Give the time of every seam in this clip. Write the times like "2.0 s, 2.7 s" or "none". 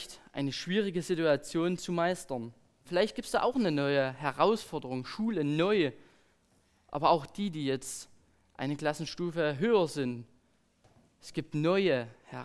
2.8 s

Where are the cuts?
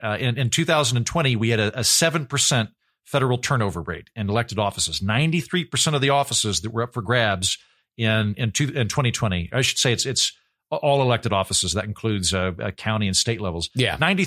none

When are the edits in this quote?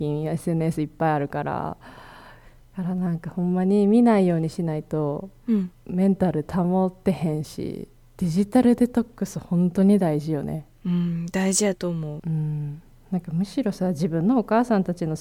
12.2 s

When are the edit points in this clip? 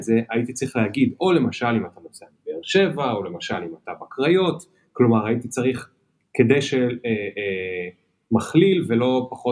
7.0 s

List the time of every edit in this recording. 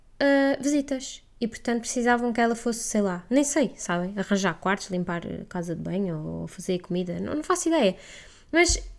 none

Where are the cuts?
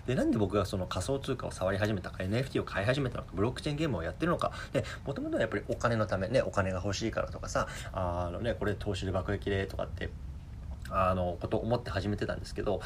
none

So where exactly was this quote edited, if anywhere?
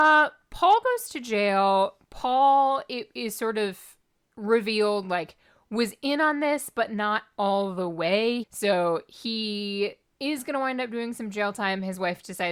8.4 s, 10.1 s

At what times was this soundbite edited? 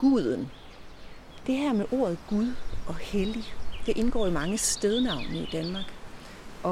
1.4 s

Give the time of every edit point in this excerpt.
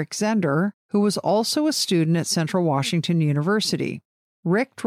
none

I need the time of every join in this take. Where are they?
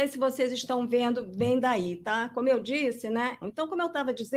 3.4 s

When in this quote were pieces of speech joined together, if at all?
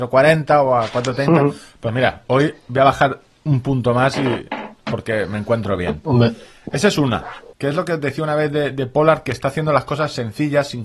7.5 s

